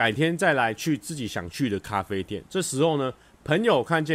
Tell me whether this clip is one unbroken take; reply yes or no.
no